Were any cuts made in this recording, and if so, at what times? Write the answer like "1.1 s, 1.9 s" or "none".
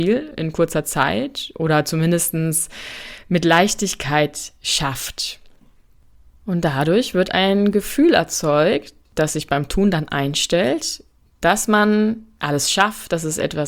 none